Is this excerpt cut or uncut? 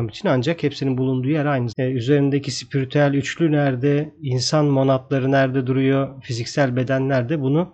cut